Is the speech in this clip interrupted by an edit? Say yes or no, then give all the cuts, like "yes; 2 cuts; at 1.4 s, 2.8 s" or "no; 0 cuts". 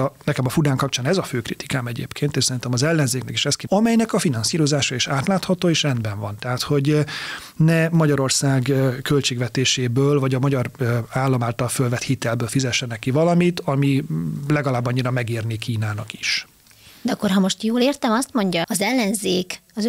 yes; 2 cuts; at 3.7 s, 18.6 s